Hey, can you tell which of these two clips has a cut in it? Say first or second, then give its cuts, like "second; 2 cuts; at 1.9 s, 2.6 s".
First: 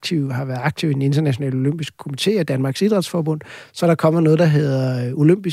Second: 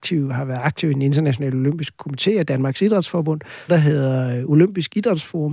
second; 1 cut; at 3.7 s